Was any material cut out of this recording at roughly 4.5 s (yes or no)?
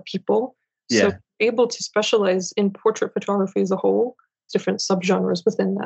yes